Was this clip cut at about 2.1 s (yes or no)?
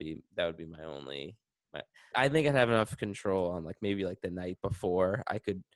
yes